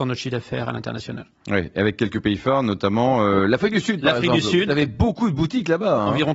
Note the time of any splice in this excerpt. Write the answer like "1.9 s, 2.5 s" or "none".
none